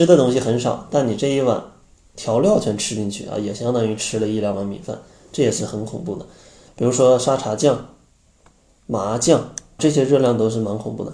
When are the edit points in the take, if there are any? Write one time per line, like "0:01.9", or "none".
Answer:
0:06.7
0:09.8